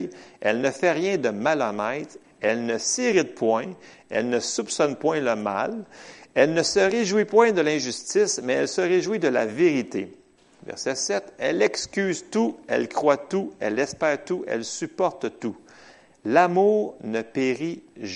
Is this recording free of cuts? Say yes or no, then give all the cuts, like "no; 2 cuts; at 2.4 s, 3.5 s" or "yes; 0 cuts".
no; 1 cut; at 2.2 s